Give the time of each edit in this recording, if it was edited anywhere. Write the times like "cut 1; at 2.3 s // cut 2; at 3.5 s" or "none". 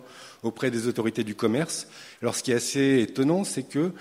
cut 1; at 2.1 s